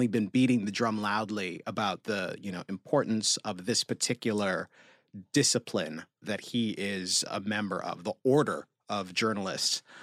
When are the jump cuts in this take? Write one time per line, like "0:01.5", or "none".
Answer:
0:06.2
0:07.3